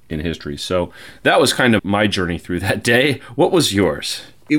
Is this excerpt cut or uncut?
cut